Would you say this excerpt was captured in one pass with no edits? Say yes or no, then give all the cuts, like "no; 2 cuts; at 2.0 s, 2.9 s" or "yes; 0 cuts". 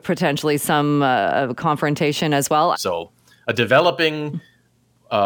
no; 1 cut; at 2.7 s